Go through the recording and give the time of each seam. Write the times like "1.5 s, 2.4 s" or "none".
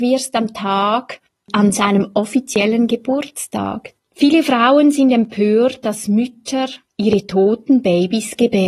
4.0 s, 5.8 s